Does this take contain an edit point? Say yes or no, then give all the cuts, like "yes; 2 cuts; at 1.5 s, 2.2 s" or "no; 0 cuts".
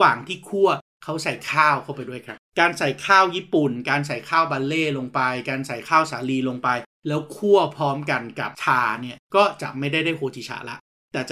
yes; 2 cuts; at 2.5 s, 9.2 s